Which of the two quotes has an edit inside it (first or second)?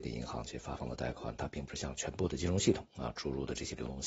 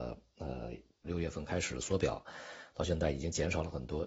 second